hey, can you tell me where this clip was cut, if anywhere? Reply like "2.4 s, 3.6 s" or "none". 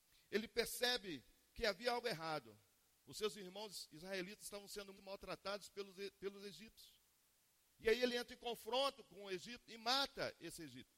4.9 s